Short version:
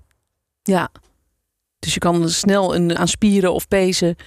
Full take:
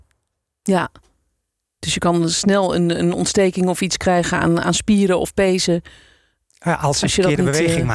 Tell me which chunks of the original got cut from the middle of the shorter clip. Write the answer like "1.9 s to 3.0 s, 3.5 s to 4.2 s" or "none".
3.0 s to 4.6 s

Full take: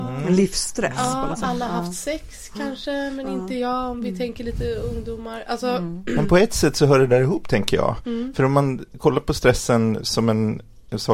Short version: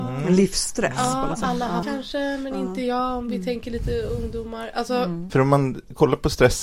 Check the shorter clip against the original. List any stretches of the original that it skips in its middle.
1.8 s to 2.6 s, 6.0 s to 8.3 s

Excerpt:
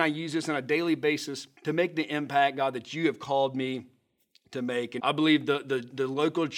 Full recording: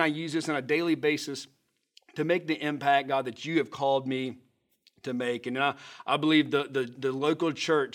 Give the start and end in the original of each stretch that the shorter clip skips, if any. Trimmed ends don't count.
1.6 s to 2.1 s, 5.5 s to 6.0 s

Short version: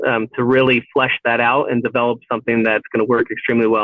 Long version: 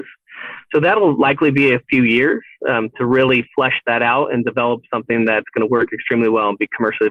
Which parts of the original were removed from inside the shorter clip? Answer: none

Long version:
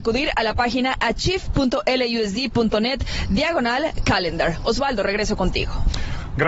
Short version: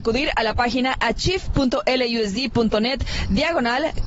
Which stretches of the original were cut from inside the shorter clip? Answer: none

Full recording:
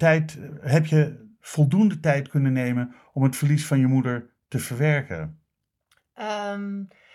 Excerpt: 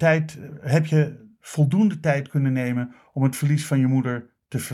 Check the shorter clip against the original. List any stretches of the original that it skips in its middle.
none

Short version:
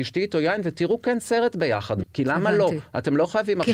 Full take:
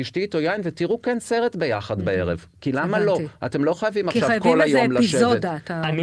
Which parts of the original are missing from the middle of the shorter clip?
2.0 s to 2.5 s

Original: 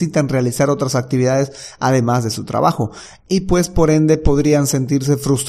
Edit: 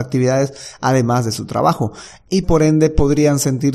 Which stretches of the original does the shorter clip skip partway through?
3.4 s to 3.7 s

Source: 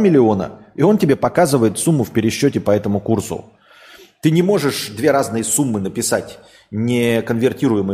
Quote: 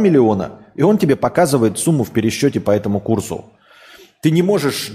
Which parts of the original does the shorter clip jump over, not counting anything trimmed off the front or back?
none

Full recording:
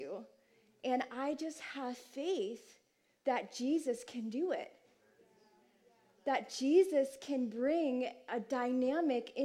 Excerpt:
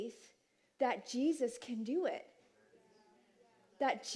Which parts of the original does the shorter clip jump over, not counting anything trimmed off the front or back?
none

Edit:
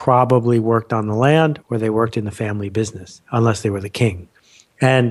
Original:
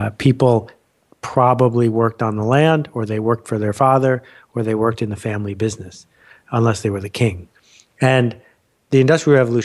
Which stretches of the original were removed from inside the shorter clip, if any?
2.9 s to 4.5 s, 6.1 s to 6.4 s

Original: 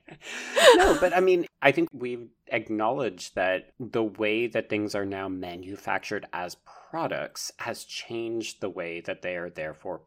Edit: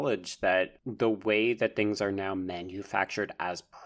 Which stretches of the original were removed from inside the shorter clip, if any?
none

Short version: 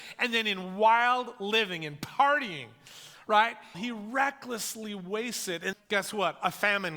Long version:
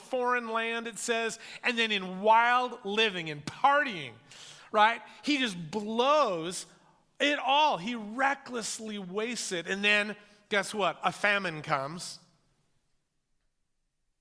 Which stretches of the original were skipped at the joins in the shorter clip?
5.2 s to 7.8 s, 9.8 s to 10.3 s

